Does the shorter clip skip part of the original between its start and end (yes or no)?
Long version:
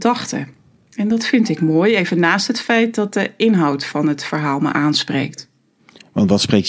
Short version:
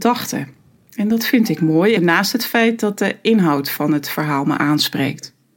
yes